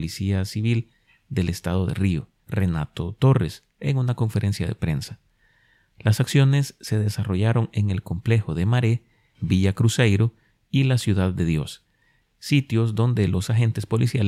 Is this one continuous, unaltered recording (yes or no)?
no